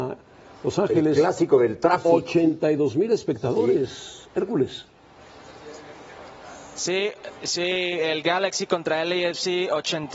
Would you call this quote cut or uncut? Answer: uncut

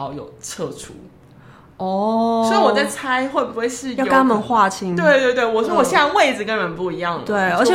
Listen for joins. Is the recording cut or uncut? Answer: uncut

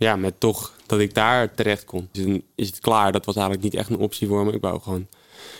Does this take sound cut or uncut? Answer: cut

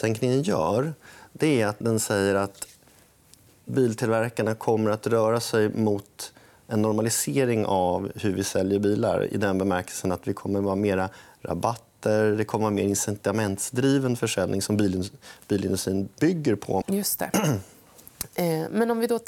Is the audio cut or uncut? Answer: cut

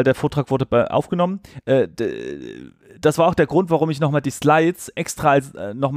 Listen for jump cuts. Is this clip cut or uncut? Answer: uncut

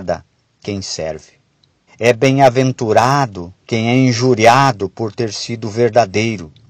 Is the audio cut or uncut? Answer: cut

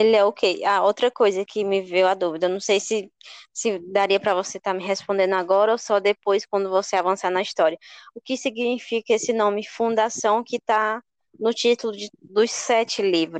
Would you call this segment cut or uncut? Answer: uncut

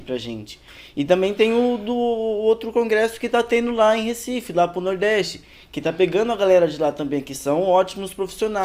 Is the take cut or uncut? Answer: uncut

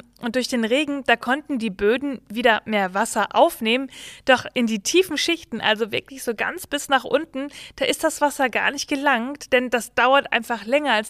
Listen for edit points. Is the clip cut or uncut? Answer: uncut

